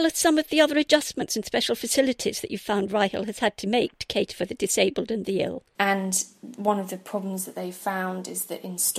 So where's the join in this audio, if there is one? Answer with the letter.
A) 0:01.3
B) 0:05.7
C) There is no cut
B